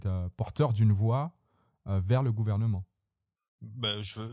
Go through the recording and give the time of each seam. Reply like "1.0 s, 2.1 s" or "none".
none